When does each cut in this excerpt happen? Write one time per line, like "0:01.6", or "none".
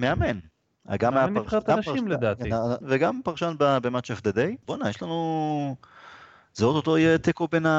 0:02.8
0:04.6